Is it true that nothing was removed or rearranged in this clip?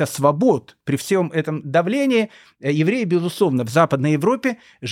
yes; 0 cuts

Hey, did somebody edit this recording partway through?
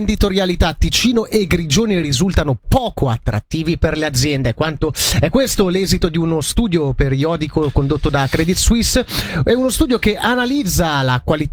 no; 0 cuts

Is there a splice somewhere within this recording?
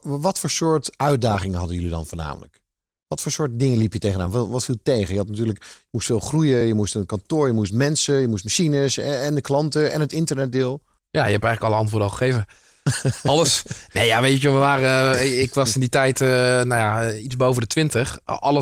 no; 0 cuts

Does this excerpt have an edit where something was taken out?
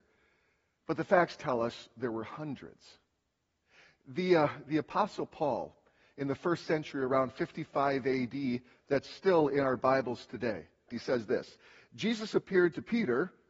yes; 2 cuts; at 8.7 s, 10.9 s

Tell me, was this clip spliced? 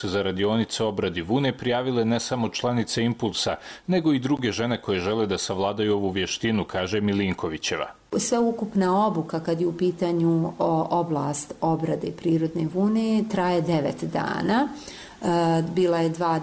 no; 0 cuts

